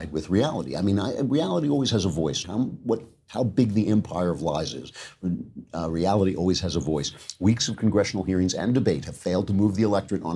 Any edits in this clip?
yes; 1 cut; at 2.4 s

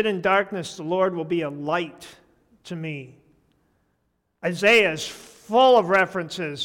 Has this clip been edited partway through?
no; 0 cuts

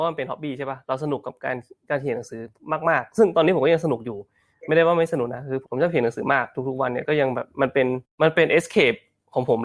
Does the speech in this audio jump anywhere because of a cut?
yes; 1 cut; at 5.7 s

